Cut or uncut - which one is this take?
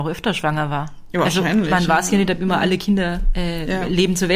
uncut